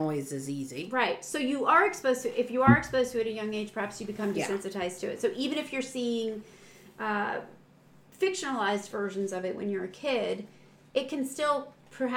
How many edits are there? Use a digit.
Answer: 0